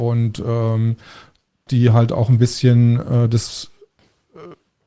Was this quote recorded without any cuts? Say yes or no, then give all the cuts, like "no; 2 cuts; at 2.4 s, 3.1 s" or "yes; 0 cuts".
no; 1 cut; at 1.7 s